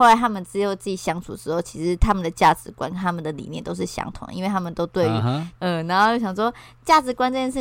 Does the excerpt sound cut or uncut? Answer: cut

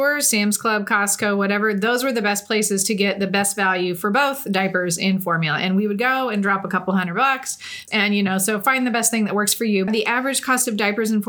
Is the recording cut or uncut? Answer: cut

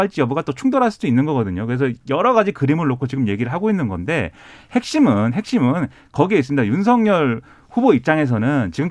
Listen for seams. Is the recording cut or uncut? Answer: uncut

